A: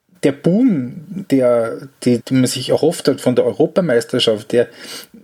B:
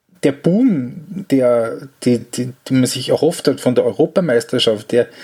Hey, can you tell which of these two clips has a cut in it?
A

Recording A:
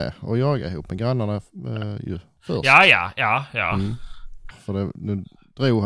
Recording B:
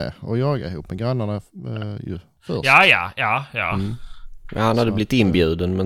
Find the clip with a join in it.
A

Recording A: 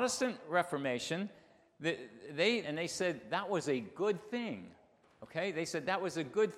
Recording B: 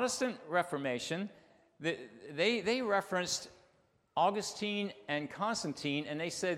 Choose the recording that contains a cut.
A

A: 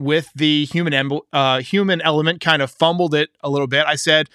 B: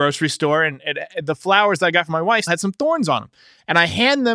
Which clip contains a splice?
B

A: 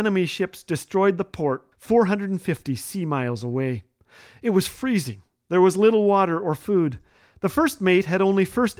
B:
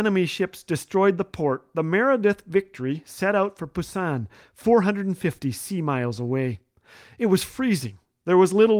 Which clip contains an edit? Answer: A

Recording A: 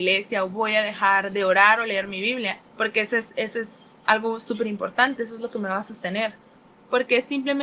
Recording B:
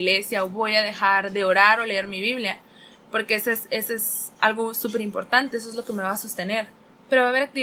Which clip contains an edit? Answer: A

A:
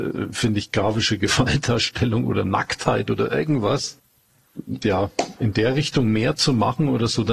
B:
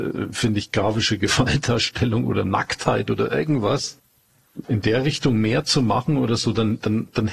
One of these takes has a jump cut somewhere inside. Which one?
B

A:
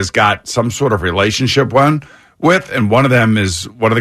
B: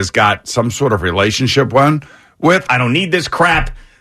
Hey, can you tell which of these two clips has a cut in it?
B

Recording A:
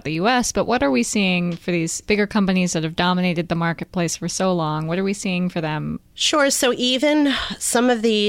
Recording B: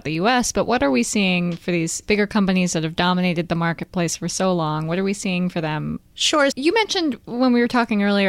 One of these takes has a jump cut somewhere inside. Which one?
B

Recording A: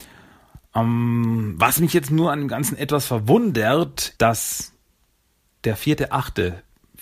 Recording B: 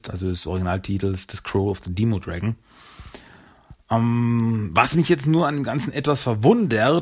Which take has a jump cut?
A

